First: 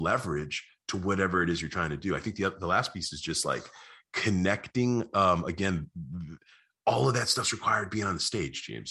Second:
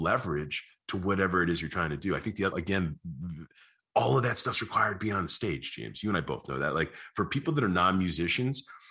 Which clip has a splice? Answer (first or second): second